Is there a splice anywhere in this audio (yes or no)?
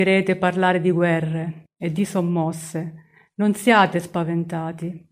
no